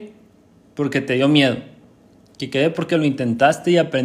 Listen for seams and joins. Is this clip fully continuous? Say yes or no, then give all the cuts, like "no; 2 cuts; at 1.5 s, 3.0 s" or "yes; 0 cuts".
yes; 0 cuts